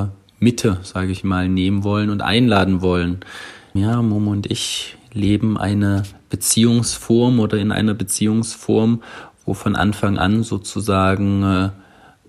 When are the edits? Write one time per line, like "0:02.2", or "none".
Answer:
0:03.8